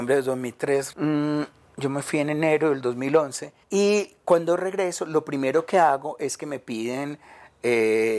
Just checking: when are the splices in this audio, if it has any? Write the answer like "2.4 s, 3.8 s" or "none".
0.9 s, 3.6 s